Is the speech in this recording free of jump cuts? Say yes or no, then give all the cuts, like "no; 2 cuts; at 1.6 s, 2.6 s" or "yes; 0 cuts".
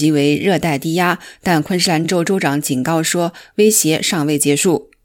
yes; 0 cuts